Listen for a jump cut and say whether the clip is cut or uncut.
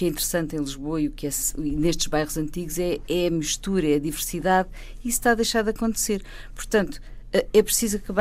uncut